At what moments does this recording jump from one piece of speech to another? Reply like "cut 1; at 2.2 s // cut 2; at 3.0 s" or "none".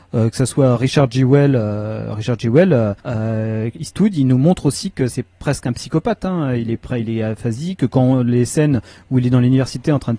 cut 1; at 3.0 s // cut 2; at 5.1 s